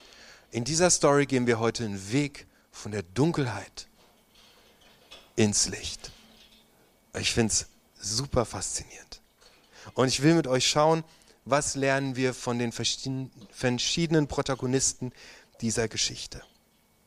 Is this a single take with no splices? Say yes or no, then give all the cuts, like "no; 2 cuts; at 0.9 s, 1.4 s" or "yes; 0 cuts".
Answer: yes; 0 cuts